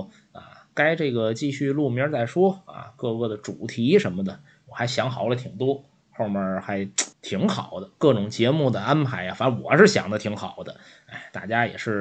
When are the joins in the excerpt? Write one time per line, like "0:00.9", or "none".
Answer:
0:07.1